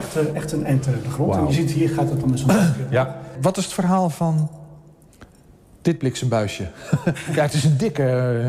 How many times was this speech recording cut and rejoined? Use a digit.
0